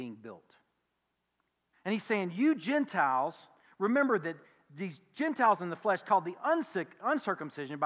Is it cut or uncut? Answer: cut